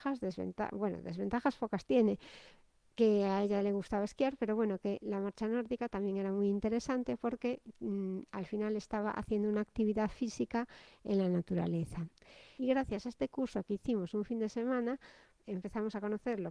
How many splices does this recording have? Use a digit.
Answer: 2